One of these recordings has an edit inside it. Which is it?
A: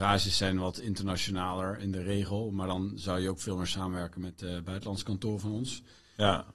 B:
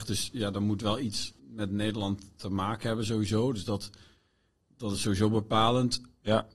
B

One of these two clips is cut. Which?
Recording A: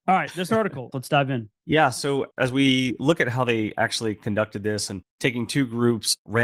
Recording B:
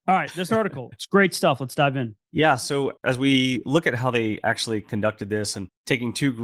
A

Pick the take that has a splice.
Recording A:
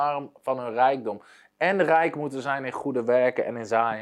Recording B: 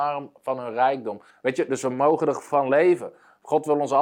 B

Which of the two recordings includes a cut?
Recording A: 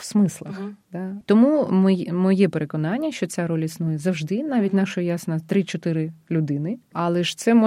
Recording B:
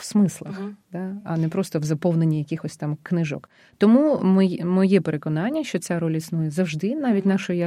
A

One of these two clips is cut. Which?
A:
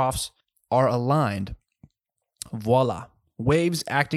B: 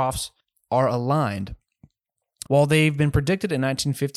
B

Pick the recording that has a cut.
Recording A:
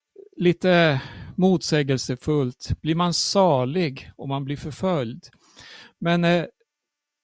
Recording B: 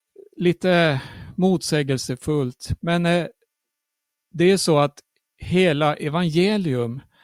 B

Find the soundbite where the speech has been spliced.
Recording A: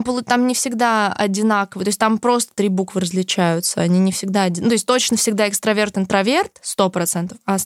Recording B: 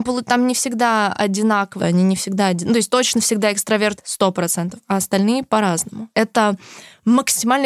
B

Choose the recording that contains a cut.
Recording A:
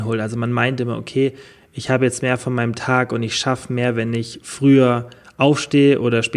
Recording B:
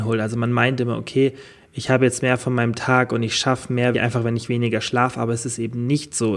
B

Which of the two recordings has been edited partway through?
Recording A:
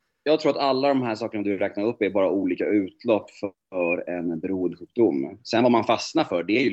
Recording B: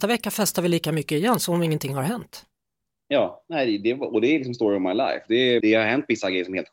B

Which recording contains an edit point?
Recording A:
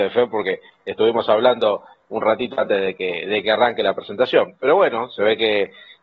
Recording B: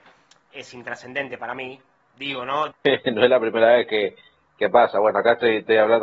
B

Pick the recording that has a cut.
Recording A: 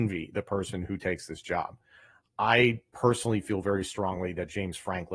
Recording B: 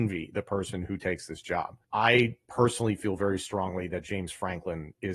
B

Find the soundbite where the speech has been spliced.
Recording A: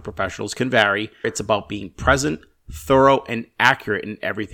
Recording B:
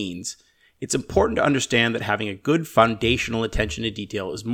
A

